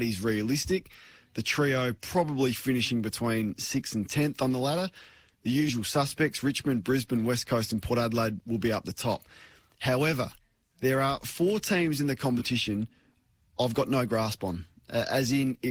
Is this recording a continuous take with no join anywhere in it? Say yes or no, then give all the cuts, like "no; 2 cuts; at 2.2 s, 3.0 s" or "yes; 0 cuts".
yes; 0 cuts